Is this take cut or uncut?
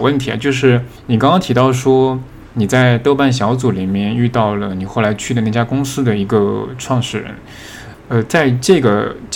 cut